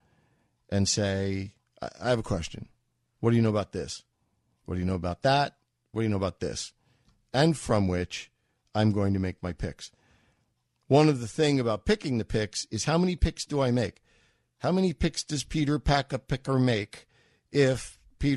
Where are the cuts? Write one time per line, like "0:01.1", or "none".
none